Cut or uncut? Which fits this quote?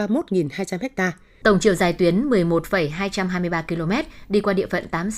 cut